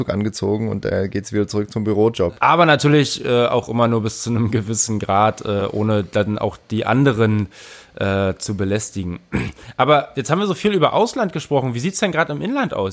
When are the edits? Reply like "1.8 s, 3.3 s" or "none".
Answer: 2.4 s